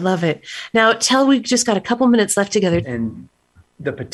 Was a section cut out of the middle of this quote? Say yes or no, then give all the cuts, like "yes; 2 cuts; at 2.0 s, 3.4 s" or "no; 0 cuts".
yes; 1 cut; at 2.8 s